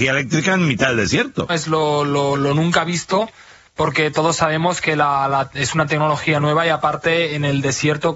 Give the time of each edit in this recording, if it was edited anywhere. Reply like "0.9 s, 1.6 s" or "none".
1.5 s